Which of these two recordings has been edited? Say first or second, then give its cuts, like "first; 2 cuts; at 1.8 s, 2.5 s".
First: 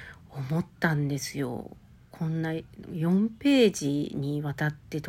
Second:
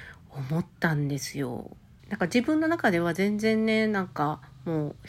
second; 1 cut; at 2.0 s